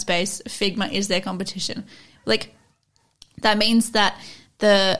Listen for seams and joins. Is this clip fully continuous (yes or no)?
no